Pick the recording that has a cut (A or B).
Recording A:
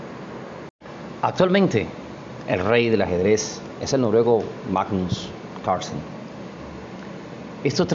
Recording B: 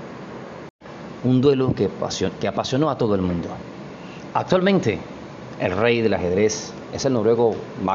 B